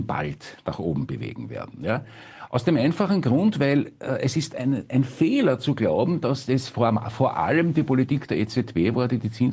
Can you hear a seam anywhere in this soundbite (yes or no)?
no